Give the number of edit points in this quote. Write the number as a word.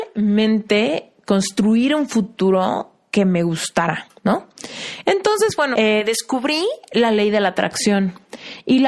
one